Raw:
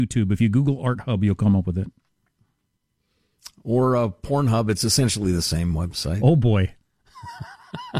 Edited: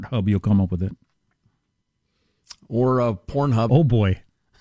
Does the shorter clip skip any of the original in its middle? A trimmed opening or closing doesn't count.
yes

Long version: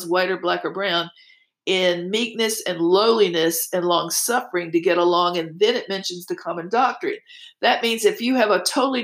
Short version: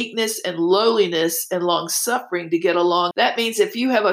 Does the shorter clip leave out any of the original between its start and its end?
yes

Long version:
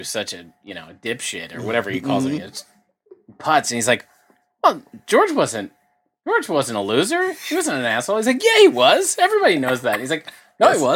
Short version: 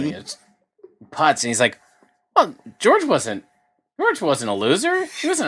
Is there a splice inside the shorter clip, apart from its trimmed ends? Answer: no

